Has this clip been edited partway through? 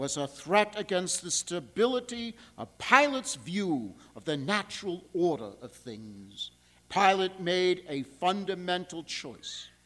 yes; 1 cut; at 6.8 s

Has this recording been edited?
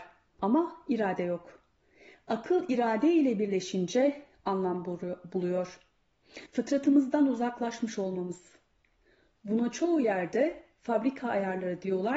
yes; 1 cut; at 6.5 s

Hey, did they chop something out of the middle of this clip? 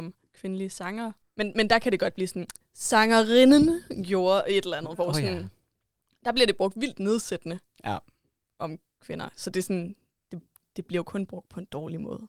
no; 0 cuts

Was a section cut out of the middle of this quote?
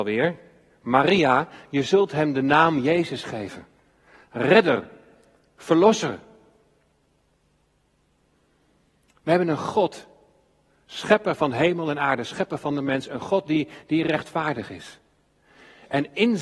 no; 0 cuts

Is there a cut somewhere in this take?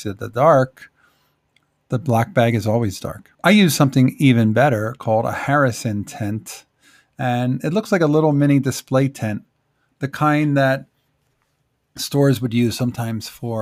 yes; 1 cut; at 3.3 s

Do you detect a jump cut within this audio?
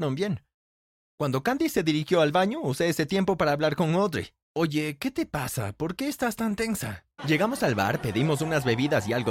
yes; 2 cuts; at 4.4 s, 7.2 s

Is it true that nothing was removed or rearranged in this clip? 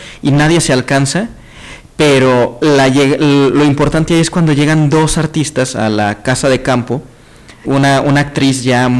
no; 1 cut; at 7.6 s

